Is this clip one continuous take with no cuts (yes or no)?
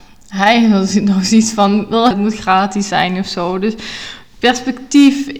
no